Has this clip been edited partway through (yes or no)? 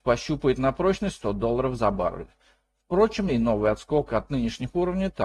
yes